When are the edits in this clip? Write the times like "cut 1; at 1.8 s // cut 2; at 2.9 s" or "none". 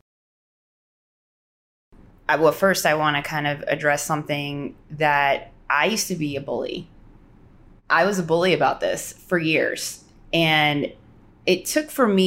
none